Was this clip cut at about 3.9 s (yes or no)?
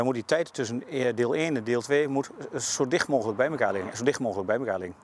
yes